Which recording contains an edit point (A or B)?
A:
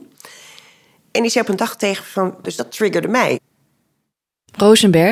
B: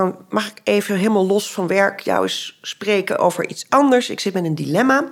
A